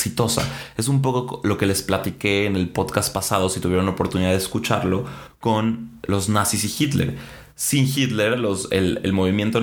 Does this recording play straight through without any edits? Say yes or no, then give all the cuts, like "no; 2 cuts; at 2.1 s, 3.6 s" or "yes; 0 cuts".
yes; 0 cuts